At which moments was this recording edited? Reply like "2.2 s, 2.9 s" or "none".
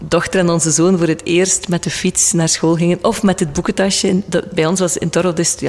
none

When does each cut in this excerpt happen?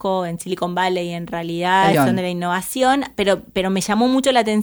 1.9 s

